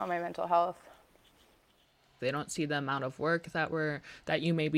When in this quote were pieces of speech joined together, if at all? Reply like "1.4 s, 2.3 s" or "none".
2.2 s

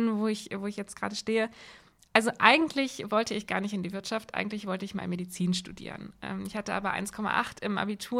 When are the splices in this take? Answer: none

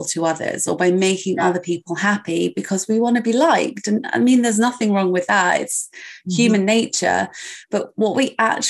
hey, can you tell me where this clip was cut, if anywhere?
none

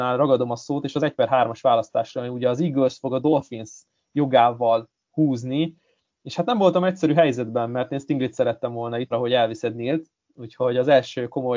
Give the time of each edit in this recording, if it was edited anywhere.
9.1 s

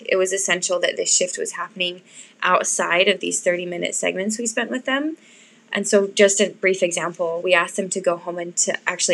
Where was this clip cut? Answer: none

